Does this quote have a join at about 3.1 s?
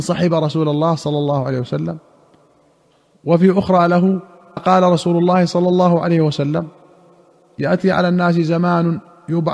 no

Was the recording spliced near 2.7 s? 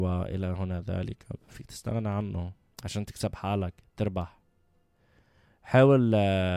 yes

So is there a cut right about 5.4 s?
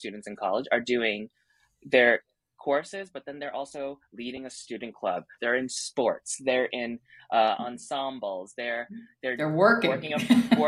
yes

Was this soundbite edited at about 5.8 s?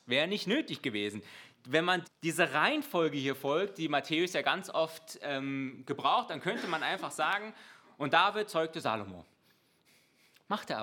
no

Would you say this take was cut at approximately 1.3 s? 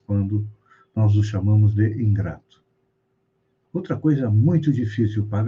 no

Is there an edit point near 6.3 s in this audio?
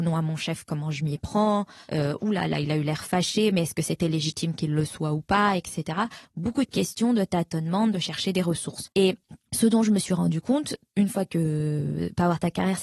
no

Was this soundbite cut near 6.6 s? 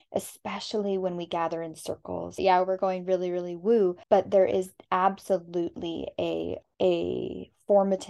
yes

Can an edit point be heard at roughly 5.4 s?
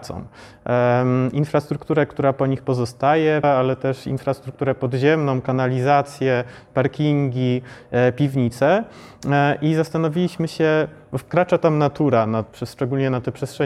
no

